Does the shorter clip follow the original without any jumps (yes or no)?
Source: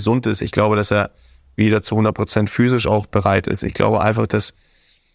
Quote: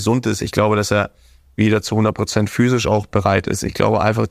yes